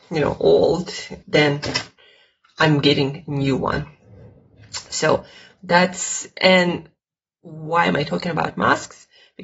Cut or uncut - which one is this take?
cut